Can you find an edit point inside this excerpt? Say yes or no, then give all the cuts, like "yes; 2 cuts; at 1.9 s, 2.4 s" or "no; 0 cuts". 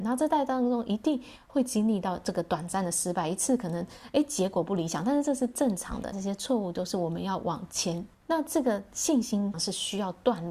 yes; 3 cuts; at 6.1 s, 8.2 s, 9.5 s